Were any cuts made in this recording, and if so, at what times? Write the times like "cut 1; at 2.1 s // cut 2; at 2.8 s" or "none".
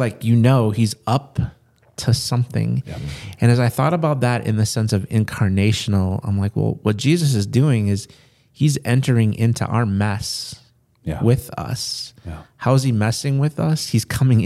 none